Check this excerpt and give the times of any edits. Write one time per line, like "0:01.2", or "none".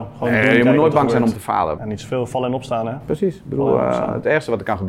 0:01.8